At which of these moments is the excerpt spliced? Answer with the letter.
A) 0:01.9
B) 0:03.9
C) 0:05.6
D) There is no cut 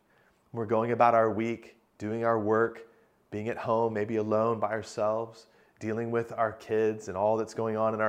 D